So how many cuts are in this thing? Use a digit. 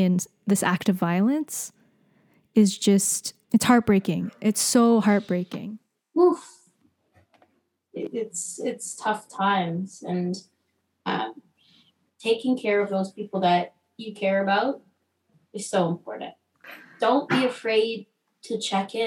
1